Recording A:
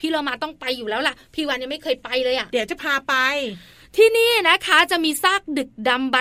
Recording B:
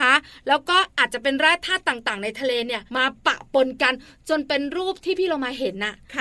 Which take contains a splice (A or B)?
B